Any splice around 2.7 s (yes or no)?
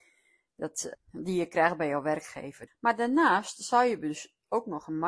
yes